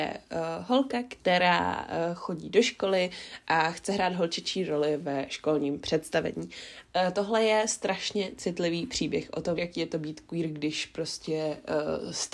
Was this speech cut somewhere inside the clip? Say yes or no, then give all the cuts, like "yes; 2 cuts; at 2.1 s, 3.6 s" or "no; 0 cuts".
yes; 2 cuts; at 6.9 s, 9.6 s